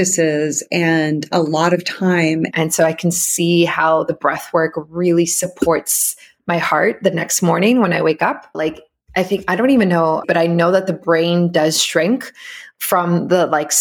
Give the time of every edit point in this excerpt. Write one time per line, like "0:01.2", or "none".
0:02.5
0:08.5
0:10.2